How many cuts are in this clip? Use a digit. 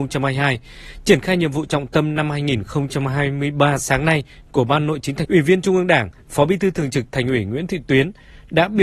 1